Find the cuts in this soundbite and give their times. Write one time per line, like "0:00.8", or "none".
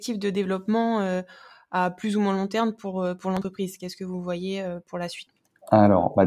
none